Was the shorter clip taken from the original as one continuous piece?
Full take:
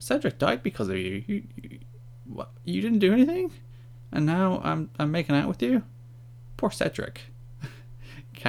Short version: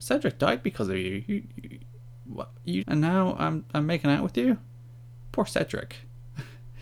no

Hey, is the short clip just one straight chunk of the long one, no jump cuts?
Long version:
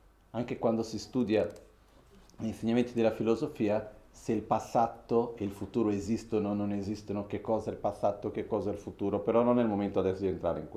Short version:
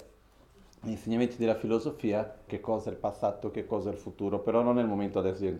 no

